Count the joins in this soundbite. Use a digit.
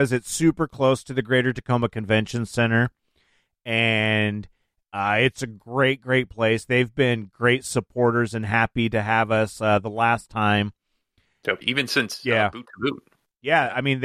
1